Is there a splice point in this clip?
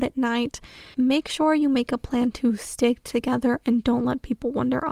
yes; 1 cut; at 0.9 s

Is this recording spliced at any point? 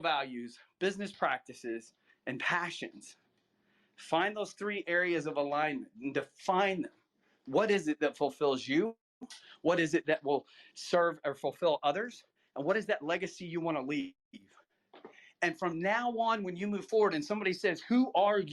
no; 0 cuts

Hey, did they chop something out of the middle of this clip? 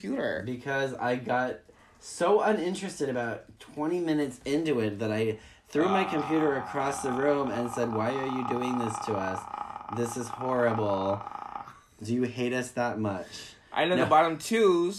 no; 0 cuts

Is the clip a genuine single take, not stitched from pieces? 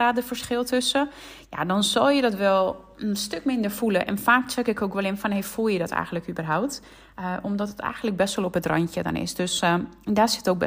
yes; 0 cuts

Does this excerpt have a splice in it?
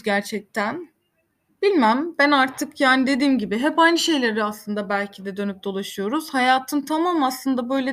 no; 0 cuts

